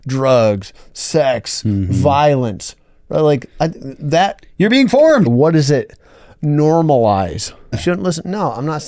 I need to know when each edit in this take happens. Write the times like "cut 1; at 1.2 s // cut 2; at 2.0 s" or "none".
cut 1; at 5.3 s // cut 2; at 7.7 s